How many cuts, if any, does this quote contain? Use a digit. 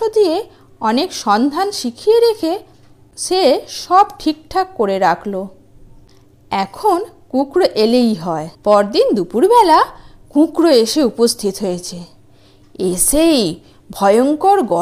1